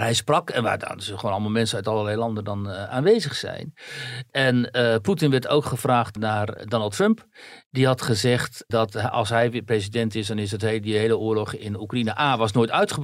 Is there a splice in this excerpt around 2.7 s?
no; 0 cuts

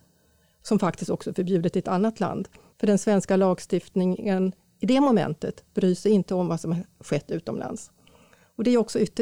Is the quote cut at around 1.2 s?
no; 1 cut; at 2.7 s

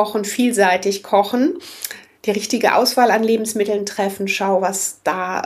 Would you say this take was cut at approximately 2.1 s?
no; 0 cuts

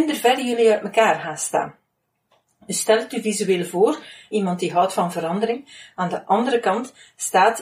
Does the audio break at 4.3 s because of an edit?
yes; 1 cut; at 4.3 s

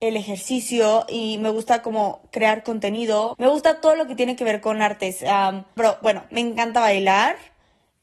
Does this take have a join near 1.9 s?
no; 2 cuts; at 3.3 s, 5.8 s

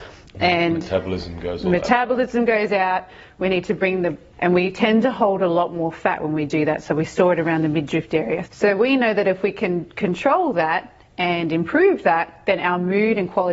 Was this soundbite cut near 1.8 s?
no; 2 cuts; at 4.3 s, 8.5 s

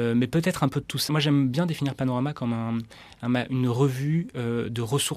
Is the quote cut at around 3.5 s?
no; 1 cut; at 1.1 s

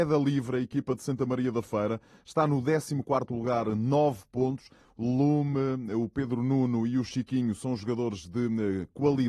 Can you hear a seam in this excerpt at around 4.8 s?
yes; 1 cut; at 4.8 s

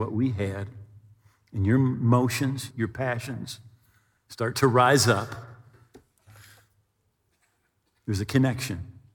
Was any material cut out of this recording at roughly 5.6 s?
no; 1 cut; at 2.7 s

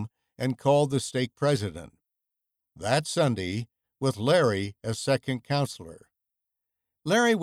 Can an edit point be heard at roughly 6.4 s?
no; 1 cut; at 3.8 s

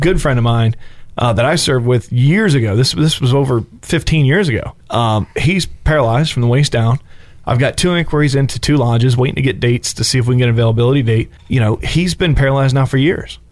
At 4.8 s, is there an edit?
yes; 2 cuts; at 4.8 s, 11.4 s

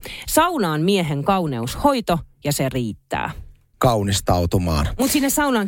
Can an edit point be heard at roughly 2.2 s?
no; 1 cut; at 3.7 s

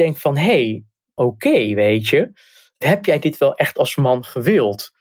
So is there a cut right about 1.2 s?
yes; 1 cut; at 1.2 s

